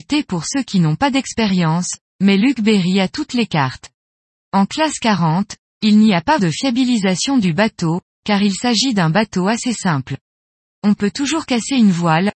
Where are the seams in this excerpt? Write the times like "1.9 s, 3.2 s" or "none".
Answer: 6.4 s, 8.1 s